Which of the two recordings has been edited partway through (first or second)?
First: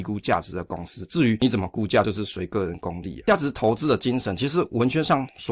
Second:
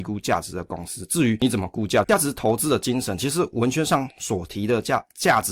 second